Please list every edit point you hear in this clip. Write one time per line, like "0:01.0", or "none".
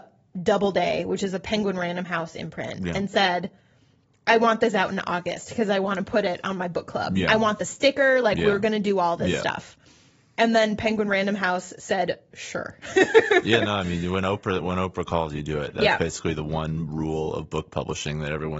none